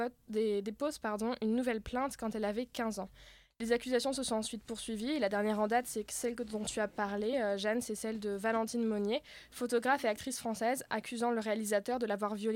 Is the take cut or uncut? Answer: uncut